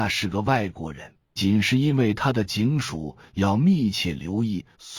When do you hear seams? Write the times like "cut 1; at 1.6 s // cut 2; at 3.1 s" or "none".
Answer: cut 1; at 1.4 s